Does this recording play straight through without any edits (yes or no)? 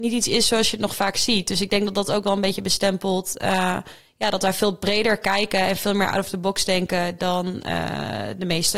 yes